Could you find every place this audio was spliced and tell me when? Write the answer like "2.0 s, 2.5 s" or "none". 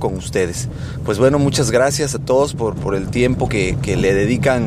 none